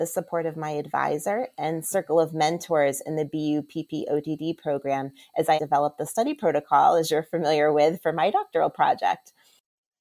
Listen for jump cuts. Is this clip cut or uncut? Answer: cut